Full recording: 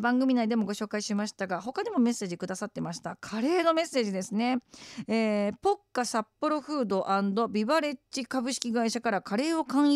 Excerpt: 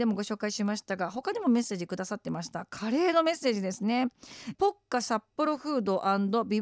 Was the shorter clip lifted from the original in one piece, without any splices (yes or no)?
no